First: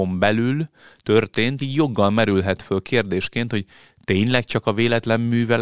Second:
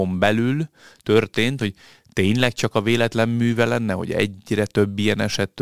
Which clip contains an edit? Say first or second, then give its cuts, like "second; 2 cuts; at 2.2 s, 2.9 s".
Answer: second; 1 cut; at 1.6 s